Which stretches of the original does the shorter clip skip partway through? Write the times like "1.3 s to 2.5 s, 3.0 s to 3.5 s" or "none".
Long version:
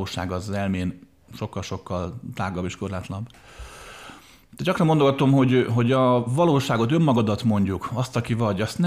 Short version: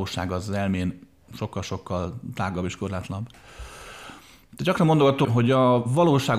5.2 s to 5.7 s

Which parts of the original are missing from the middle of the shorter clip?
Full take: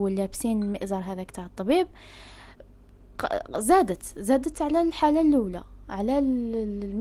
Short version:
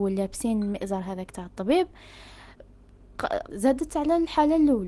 3.5 s to 4.1 s

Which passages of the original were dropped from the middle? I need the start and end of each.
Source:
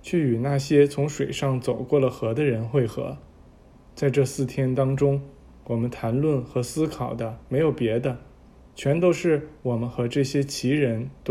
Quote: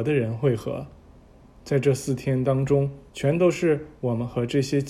5.4 s to 8.7 s

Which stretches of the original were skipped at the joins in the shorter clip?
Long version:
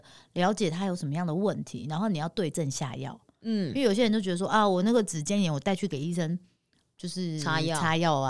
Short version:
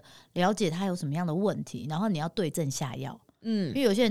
none

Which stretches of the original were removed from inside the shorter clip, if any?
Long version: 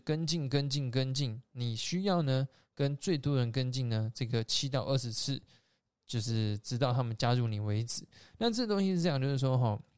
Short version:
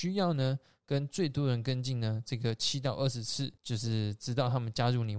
5.5 s to 6.0 s

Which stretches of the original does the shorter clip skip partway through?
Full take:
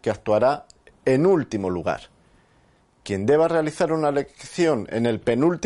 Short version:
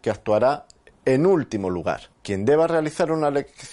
2.1 s to 2.9 s

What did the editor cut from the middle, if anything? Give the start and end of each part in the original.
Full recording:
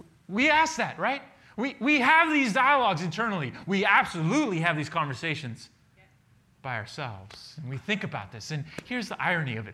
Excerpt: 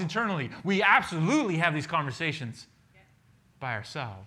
none

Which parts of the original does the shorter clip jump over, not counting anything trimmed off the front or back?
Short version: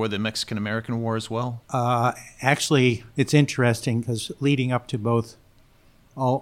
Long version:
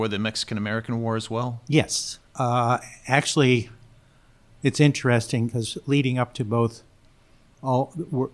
1.6 s to 2.3 s, 3.8 s to 4.6 s

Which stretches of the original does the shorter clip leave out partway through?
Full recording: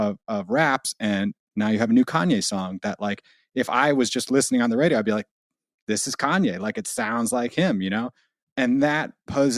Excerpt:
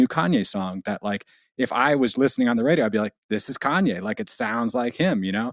4.1 s to 4.3 s, 5.3 s to 5.8 s

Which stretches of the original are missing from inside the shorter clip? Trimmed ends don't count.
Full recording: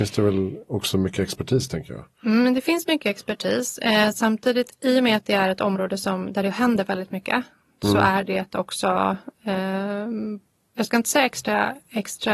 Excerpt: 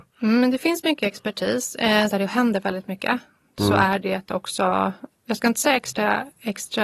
4.1 s to 6.3 s, 9.4 s to 10.6 s

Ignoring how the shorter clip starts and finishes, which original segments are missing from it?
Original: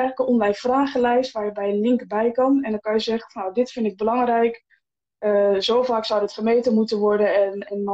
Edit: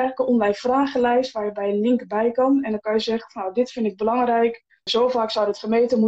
4.9 s to 5.6 s

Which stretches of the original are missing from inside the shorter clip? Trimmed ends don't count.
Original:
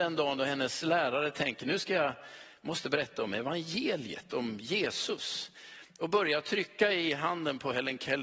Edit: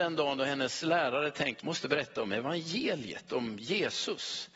1.6 s to 2.6 s

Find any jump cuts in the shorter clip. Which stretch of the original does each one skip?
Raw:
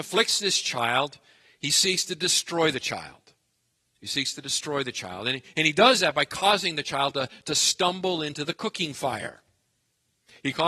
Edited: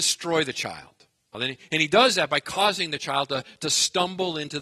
3.6 s to 5.2 s

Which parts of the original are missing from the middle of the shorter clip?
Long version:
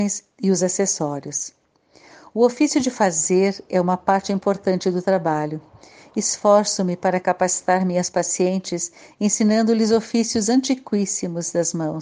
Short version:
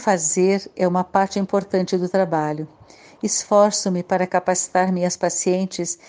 none

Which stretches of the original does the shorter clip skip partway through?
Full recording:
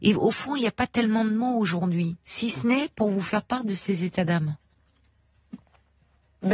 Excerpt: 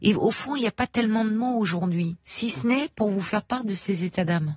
none

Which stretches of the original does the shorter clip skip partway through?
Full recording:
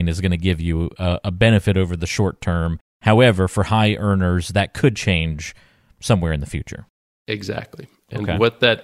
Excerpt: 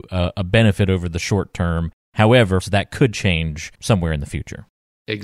3.5 s to 4.4 s, 5.6 s to 5.9 s

